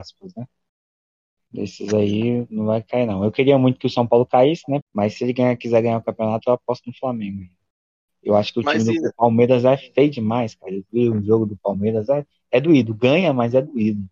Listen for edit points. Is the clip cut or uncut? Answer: cut